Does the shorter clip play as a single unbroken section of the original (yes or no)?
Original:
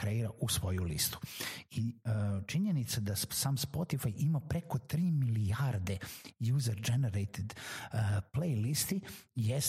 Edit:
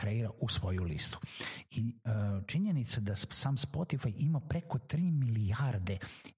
yes